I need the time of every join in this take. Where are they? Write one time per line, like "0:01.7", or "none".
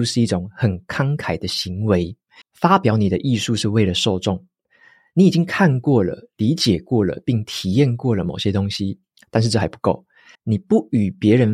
0:02.4
0:10.4